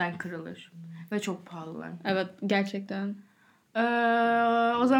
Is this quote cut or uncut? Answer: uncut